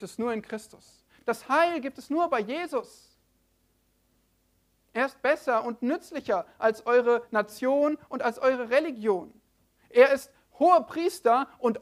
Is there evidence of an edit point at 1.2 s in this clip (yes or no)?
no